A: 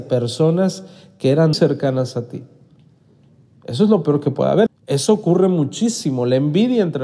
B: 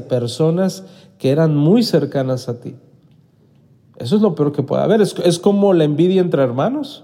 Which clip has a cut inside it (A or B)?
A